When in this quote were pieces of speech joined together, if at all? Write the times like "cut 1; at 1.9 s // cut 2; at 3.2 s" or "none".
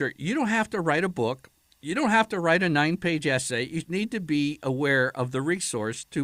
cut 1; at 3.8 s